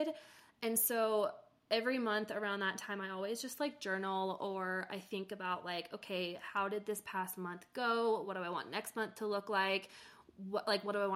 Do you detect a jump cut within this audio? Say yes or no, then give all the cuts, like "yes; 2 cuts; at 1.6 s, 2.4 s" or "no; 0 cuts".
no; 0 cuts